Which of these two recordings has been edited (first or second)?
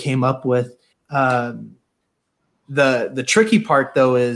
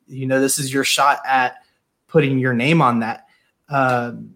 first